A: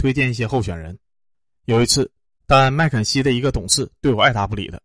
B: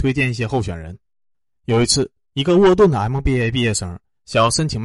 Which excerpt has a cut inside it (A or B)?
A